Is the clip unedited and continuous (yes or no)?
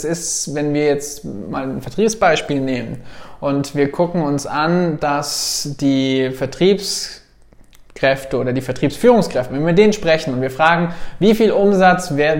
no